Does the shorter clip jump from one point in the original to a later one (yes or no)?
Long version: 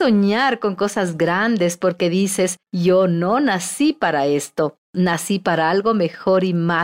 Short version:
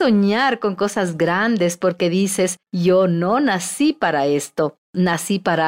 no